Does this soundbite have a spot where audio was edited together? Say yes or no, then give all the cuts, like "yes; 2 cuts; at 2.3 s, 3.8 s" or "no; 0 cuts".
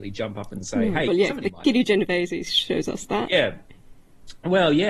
yes; 1 cut; at 1.1 s